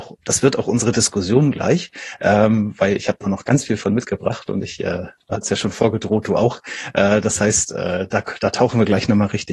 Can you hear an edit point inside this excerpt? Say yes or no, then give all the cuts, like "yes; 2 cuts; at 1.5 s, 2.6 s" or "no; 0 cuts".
no; 0 cuts